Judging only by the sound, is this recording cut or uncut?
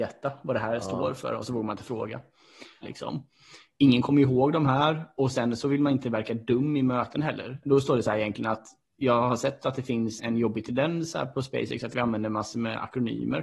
cut